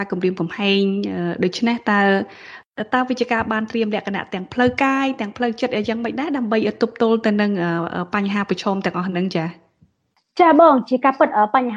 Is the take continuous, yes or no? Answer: yes